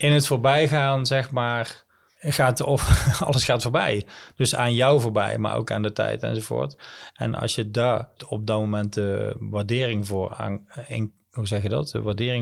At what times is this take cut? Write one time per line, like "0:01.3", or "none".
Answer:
none